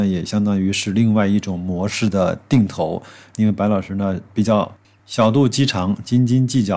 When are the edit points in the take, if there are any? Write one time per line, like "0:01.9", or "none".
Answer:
0:03.3